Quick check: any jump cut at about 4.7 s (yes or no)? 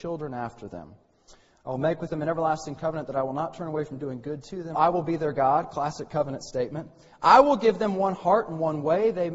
yes